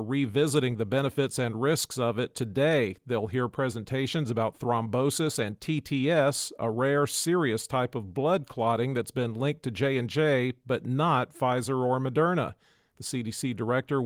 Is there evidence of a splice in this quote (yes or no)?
no